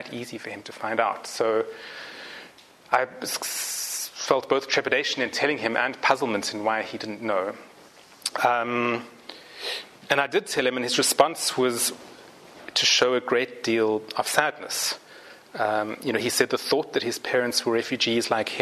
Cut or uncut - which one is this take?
uncut